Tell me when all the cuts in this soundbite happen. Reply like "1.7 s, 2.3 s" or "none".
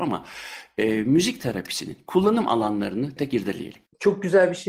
3.2 s